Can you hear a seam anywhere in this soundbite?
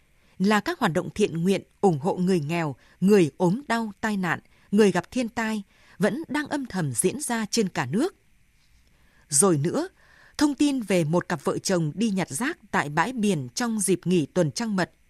no; 0 cuts

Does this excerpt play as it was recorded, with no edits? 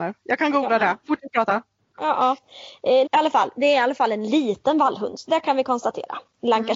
no; 1 cut; at 3.1 s

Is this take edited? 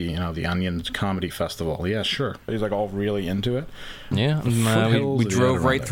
yes; 2 cuts; at 2.5 s, 4.1 s

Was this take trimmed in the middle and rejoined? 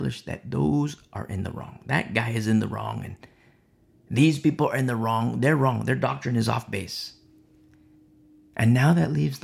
no; 0 cuts

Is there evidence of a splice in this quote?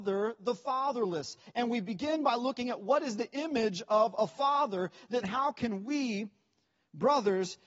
yes; 1 cut; at 5.2 s

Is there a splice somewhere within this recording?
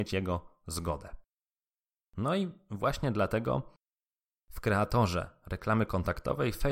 no; 0 cuts

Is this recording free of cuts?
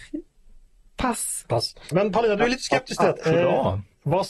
no; 2 cuts; at 1.9 s, 3.2 s

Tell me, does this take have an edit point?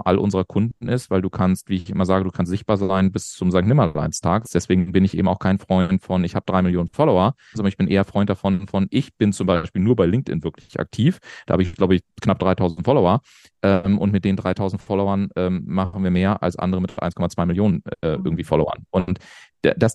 yes; 2 cuts; at 4.4 s, 7.5 s

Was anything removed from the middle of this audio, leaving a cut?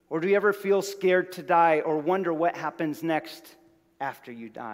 no; 0 cuts

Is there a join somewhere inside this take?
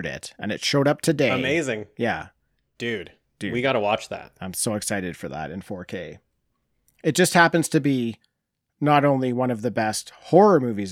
no; 0 cuts

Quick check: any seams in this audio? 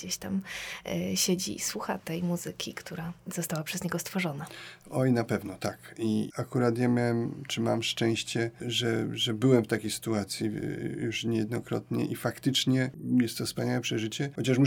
no; 0 cuts

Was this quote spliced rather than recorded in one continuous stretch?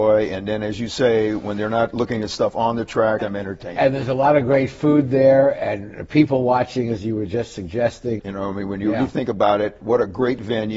yes; 2 cuts; at 3.2 s, 8.2 s

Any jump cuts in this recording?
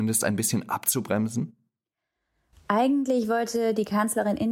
no; 0 cuts

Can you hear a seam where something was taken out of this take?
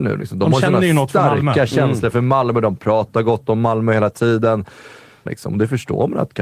yes; 1 cut; at 5.3 s

